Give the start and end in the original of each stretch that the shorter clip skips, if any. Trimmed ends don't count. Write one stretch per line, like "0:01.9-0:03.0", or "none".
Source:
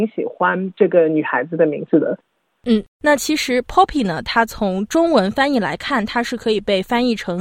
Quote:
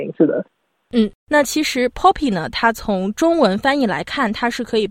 none